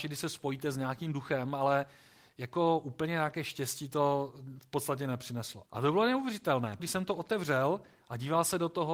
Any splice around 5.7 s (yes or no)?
yes